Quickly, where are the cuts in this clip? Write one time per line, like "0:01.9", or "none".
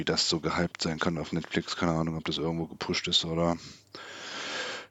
none